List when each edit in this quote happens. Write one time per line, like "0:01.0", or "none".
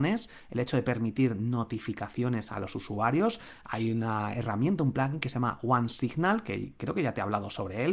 none